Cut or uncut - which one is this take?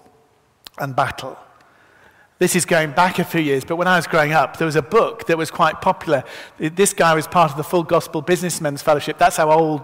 uncut